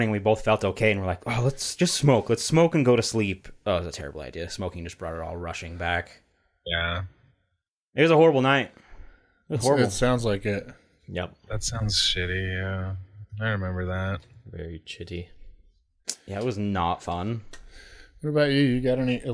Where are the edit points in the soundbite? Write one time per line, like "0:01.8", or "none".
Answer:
none